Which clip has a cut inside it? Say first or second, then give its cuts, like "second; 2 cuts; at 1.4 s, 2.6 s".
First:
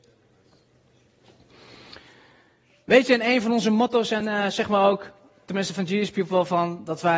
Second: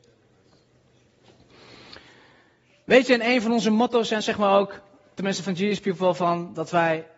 second; 1 cut; at 4.2 s